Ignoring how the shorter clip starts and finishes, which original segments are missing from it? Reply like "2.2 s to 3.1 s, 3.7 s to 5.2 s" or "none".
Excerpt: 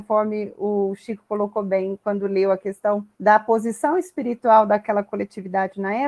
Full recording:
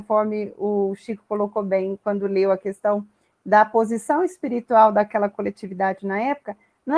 3.1 s to 3.4 s